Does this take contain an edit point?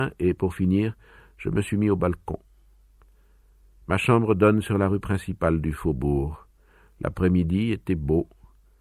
no; 0 cuts

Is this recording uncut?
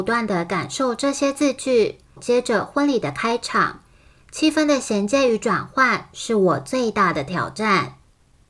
no; 1 cut; at 2.2 s

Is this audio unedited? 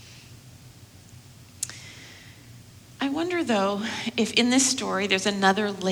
yes; 0 cuts

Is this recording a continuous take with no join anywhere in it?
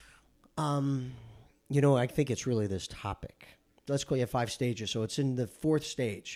no; 1 cut; at 3.9 s

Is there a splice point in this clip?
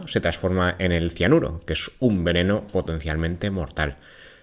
no; 0 cuts

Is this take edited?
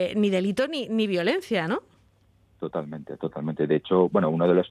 no; 0 cuts

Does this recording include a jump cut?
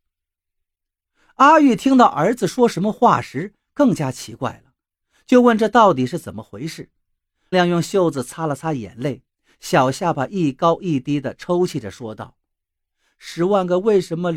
yes; 1 cut; at 7.5 s

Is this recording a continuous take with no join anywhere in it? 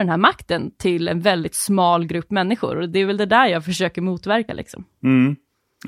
yes; 0 cuts

